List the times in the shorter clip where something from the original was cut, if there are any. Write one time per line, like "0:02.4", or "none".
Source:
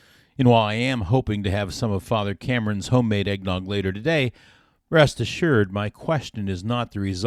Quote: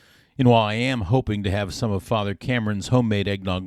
none